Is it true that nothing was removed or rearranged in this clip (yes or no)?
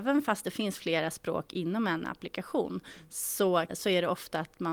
no